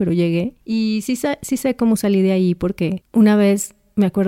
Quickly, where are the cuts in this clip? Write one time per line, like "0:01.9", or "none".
none